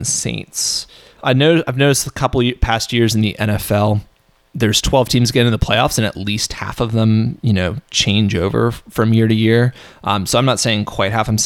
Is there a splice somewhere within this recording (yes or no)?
yes